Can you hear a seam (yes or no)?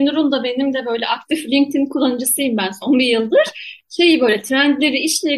no